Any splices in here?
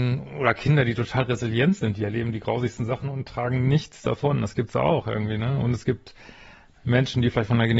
no; 0 cuts

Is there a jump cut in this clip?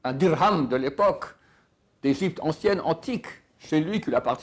no; 0 cuts

